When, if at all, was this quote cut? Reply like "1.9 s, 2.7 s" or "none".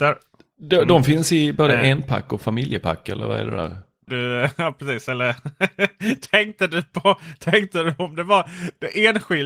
4.1 s